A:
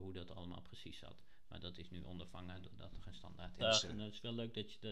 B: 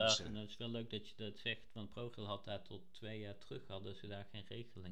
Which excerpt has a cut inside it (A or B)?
A